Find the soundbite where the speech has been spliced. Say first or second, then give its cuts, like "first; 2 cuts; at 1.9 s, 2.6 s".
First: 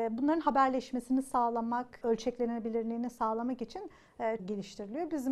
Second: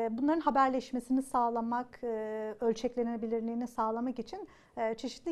first; 2 cuts; at 2.0 s, 4.4 s